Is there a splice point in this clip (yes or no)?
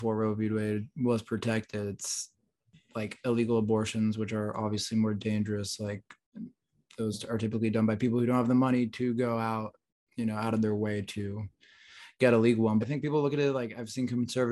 yes